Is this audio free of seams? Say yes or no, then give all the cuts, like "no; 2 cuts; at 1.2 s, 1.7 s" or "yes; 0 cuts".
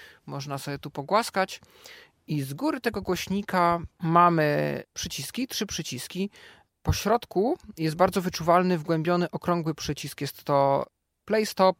no; 1 cut; at 3.9 s